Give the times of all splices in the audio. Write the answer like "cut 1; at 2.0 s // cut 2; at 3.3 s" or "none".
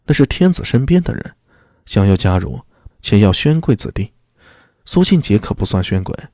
cut 1; at 2.9 s